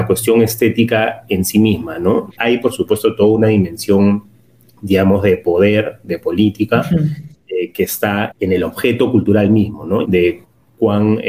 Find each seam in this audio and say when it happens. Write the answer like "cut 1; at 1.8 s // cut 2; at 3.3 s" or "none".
cut 1; at 2.3 s // cut 2; at 8.3 s // cut 3; at 10.0 s